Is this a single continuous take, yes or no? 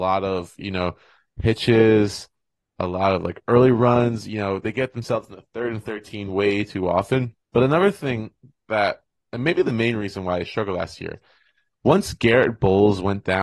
no